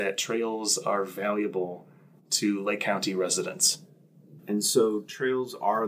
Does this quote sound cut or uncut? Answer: cut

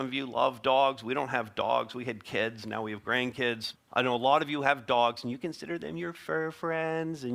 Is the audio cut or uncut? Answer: cut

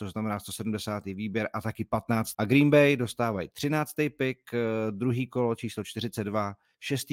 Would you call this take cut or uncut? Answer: cut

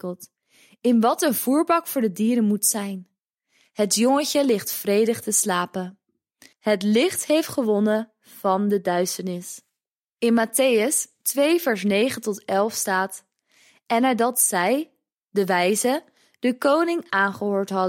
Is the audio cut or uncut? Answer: cut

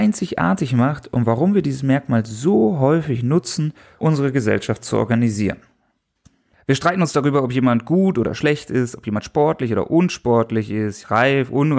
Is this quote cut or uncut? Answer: cut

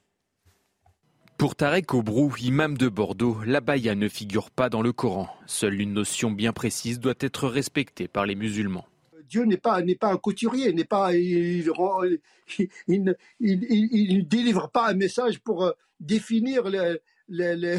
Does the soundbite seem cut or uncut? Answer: uncut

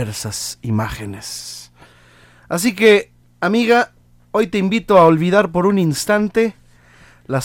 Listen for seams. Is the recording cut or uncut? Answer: cut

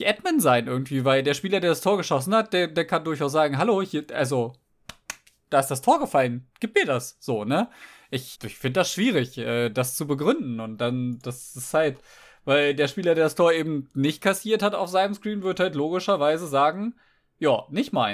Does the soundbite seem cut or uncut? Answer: cut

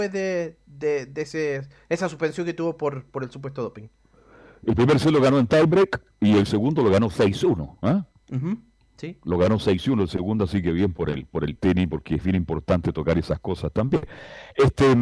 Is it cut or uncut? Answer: uncut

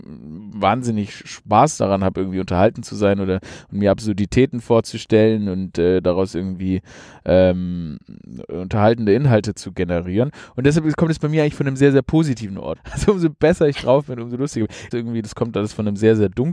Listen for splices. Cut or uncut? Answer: cut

